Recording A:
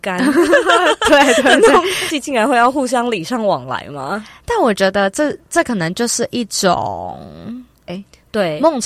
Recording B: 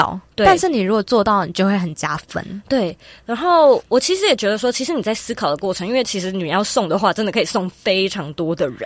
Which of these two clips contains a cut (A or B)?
A